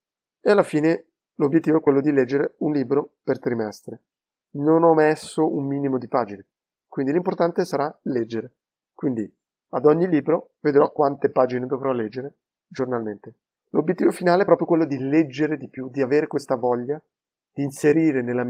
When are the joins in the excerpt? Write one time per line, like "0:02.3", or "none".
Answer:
none